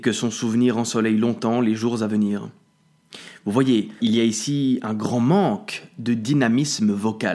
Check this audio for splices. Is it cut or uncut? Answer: cut